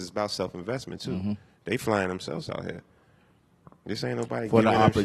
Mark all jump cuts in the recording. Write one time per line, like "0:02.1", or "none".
none